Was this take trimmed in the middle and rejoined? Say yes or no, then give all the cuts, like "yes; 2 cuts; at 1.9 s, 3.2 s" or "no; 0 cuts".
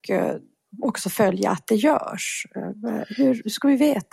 no; 0 cuts